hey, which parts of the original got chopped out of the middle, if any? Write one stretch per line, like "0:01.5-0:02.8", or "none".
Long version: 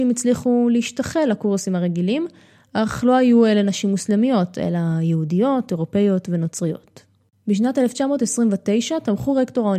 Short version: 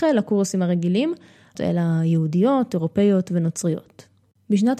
0:02.7-0:04.5